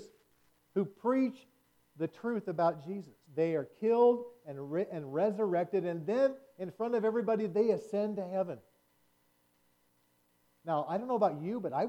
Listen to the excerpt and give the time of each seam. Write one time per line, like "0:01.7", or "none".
0:03.2